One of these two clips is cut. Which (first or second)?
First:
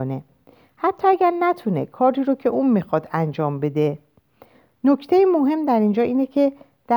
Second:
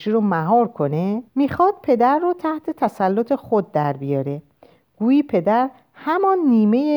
second